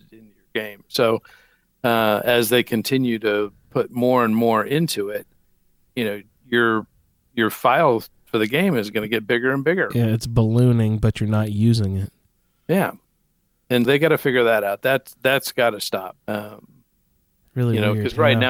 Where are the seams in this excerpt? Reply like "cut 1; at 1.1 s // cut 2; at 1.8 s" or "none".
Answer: cut 1; at 13.9 s // cut 2; at 16.2 s